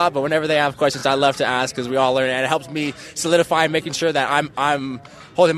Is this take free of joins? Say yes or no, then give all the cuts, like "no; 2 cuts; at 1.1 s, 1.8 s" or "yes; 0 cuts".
yes; 0 cuts